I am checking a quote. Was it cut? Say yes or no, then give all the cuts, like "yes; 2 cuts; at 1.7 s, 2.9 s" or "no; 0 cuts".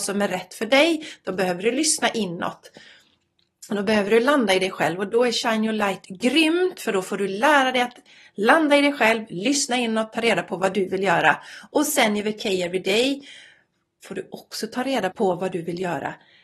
yes; 1 cut; at 15.1 s